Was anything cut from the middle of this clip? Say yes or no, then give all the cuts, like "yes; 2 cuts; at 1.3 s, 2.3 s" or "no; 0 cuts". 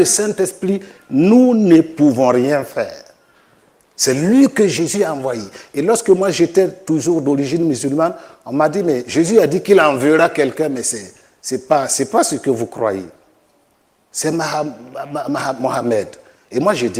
no; 0 cuts